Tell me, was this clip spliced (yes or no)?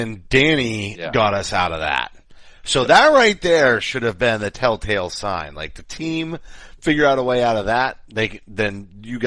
no